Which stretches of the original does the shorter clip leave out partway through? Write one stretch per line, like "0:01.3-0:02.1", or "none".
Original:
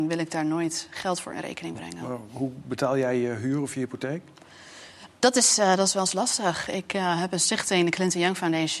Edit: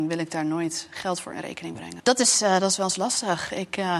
0:02.0-0:05.2